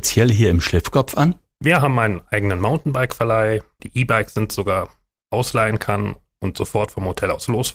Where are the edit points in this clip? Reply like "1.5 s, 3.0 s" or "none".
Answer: 3.8 s